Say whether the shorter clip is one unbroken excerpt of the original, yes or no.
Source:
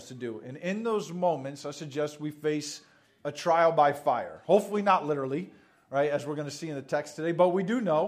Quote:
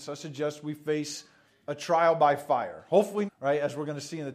no